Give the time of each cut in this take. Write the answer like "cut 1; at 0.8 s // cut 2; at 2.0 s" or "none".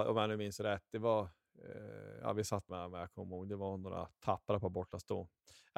cut 1; at 2.7 s